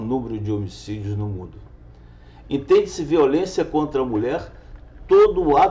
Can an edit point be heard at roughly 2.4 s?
yes; 1 cut; at 2.4 s

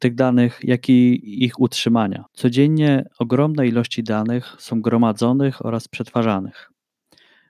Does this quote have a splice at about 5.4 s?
no; 1 cut; at 2.3 s

